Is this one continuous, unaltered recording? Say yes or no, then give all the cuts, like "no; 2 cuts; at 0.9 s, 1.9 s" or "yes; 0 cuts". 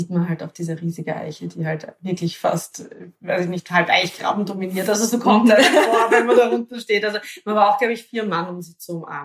yes; 0 cuts